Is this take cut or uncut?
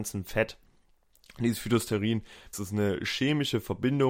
cut